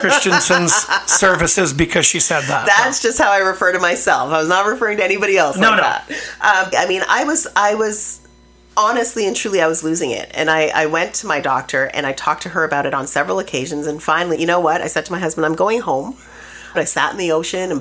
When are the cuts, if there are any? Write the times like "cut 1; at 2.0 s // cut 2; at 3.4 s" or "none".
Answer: cut 1; at 6.7 s // cut 2; at 14.3 s // cut 3; at 16.7 s